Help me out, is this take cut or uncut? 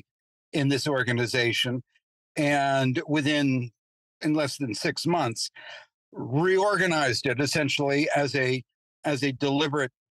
uncut